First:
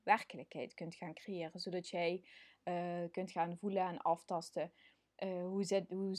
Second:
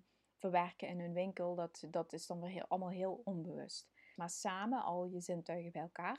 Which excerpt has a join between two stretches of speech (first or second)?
second